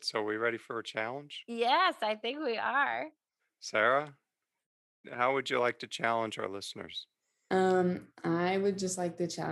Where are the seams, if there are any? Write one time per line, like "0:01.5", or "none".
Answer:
none